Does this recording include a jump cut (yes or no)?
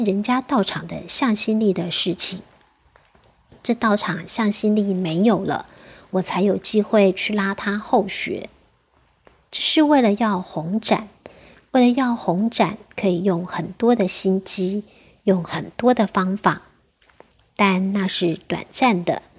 no